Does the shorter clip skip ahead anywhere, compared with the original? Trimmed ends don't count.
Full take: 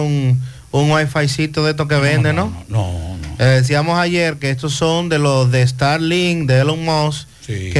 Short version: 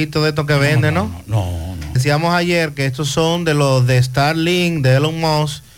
yes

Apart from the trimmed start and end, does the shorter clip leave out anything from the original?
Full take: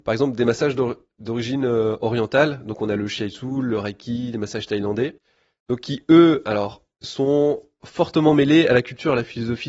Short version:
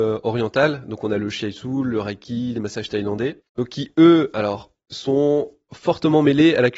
yes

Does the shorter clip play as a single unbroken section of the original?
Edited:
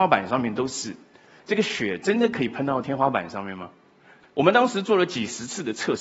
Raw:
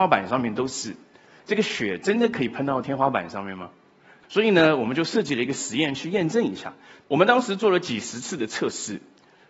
no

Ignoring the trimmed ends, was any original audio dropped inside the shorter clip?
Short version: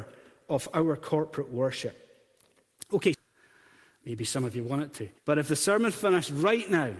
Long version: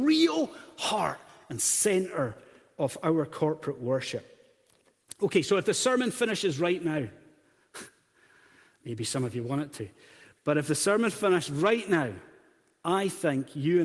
yes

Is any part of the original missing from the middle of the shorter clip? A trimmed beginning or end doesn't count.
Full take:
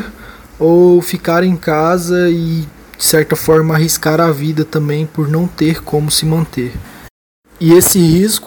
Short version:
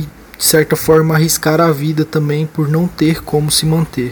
no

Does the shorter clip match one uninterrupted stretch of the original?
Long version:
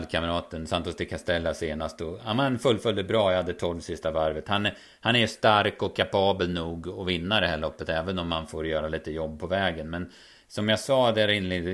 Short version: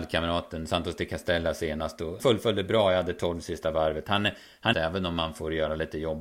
no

